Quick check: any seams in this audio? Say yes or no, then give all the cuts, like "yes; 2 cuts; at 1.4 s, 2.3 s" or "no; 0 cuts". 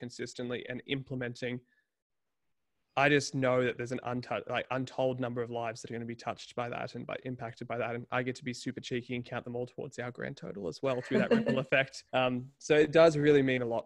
yes; 1 cut; at 12.1 s